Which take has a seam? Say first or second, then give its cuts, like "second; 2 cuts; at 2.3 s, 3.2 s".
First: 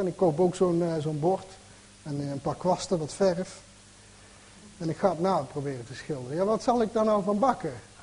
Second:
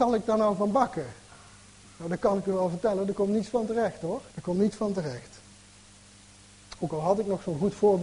second; 1 cut; at 4.3 s